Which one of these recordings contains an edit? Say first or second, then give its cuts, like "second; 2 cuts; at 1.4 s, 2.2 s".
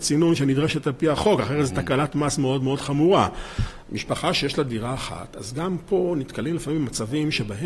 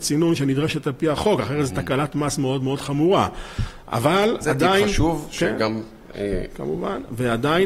first; 1 cut; at 3.8 s